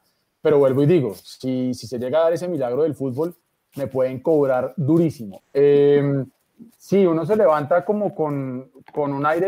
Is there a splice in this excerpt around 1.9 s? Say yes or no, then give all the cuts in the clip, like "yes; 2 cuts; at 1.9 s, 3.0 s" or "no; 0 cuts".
no; 1 cut; at 5.4 s